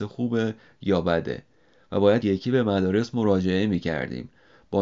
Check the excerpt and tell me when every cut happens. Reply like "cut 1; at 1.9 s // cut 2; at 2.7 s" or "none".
cut 1; at 2.2 s